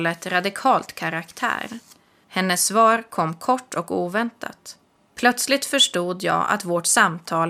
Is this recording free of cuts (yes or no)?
no